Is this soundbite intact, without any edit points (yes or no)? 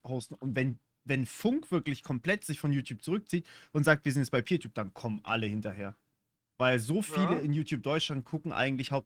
yes